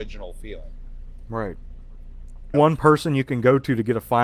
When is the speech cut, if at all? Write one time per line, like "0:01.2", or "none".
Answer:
0:02.5